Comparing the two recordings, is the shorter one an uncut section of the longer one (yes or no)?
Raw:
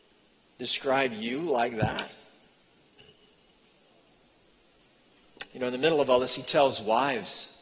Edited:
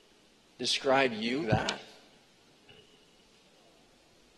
no